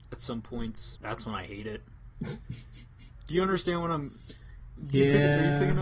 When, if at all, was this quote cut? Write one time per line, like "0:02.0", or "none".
0:01.0